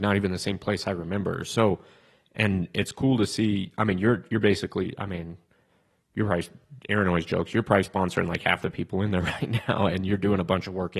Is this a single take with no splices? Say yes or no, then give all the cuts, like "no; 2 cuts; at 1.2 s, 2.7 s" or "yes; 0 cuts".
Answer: yes; 0 cuts